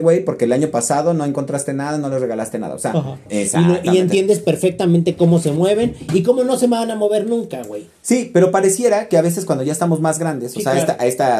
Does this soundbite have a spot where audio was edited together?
yes; 1 cut; at 3.3 s

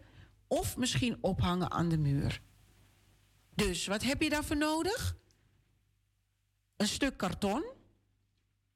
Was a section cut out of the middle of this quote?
no; 0 cuts

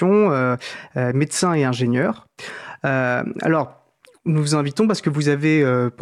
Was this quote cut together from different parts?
no; 0 cuts

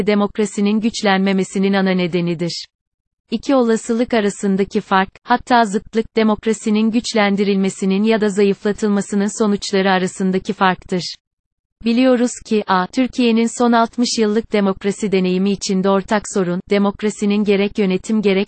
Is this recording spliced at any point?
no; 0 cuts

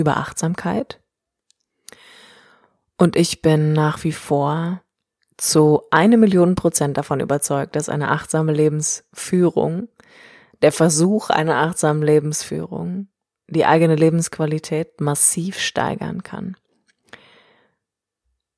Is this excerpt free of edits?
yes; 0 cuts

